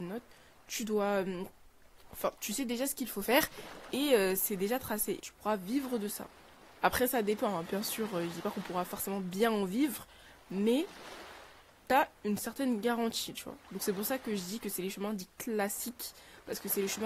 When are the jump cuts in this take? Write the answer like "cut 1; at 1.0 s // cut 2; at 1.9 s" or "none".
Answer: cut 1; at 5.2 s